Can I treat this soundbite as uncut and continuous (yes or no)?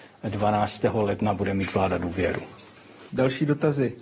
no